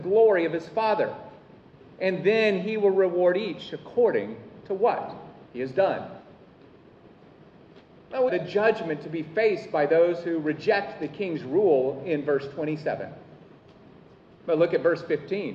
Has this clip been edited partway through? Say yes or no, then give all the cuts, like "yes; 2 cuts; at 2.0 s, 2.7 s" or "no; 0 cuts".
yes; 2 cuts; at 8.3 s, 14.4 s